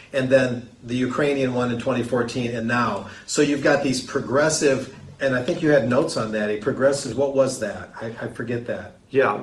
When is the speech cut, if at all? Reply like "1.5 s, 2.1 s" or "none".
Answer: 2.6 s, 7.1 s